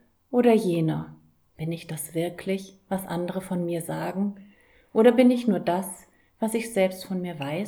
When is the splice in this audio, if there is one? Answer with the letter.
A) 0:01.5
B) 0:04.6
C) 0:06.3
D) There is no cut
A